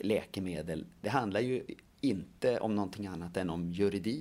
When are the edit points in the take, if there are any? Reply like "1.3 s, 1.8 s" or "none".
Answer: none